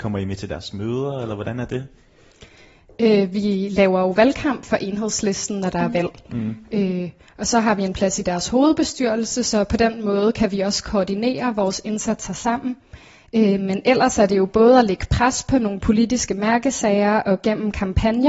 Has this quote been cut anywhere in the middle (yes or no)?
no